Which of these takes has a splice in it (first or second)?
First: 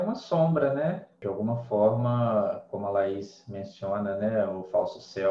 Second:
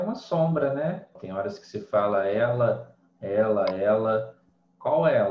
second